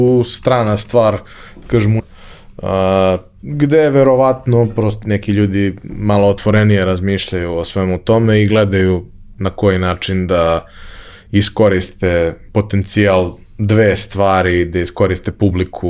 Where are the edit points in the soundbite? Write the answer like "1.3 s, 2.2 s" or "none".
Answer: 2.0 s, 5.0 s